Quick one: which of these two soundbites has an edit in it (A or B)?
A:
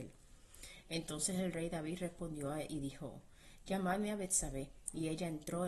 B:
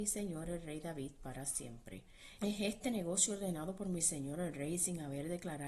B